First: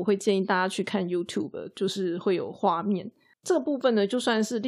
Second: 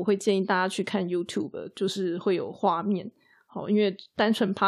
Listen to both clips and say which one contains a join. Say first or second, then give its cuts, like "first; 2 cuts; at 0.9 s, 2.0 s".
first; 1 cut; at 3.3 s